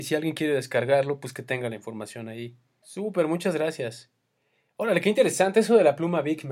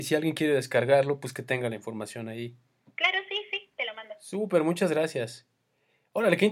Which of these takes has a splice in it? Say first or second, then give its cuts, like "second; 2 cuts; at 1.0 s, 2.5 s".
first; 1 cut; at 2.8 s